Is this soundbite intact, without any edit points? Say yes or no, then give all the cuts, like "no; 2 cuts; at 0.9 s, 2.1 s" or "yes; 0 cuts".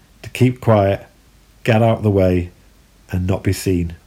yes; 0 cuts